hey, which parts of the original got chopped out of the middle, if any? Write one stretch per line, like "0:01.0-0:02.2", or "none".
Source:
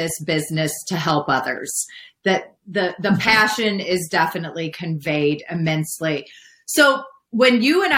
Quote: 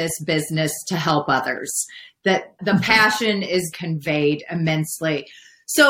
0:02.6-0:03.0
0:04.1-0:04.7